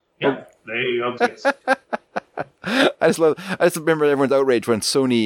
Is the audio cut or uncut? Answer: cut